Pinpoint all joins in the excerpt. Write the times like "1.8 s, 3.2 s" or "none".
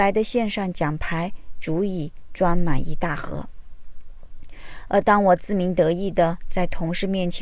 none